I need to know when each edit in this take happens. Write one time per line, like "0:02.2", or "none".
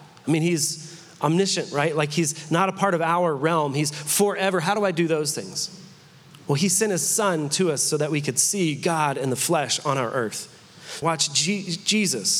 0:11.0